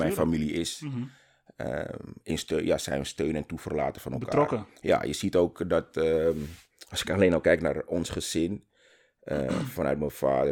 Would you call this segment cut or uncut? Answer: uncut